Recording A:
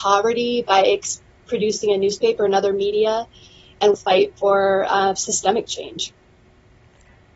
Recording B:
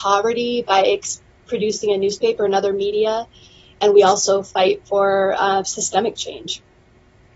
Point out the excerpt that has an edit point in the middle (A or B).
A